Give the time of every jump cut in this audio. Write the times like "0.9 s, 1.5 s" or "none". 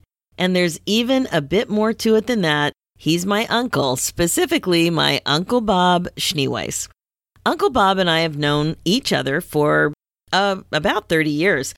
none